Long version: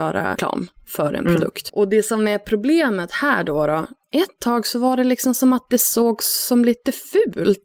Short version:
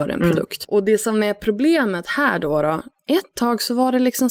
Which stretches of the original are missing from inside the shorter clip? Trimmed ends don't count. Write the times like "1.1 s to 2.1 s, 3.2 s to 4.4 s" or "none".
none